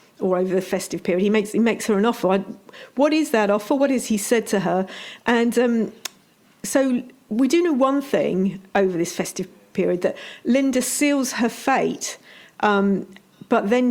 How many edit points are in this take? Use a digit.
0